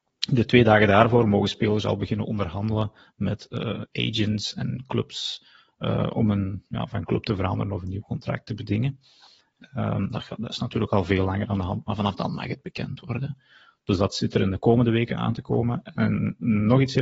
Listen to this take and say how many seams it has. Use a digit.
0